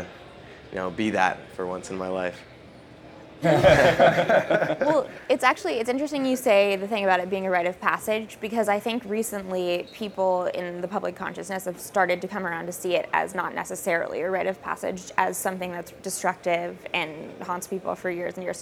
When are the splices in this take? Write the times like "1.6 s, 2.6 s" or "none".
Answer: 3.4 s, 16.0 s